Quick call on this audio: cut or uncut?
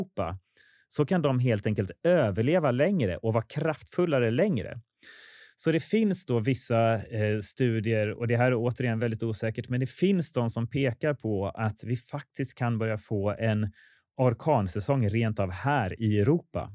uncut